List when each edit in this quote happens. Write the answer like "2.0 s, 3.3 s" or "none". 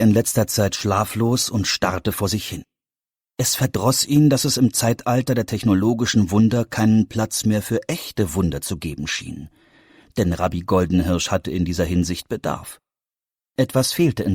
none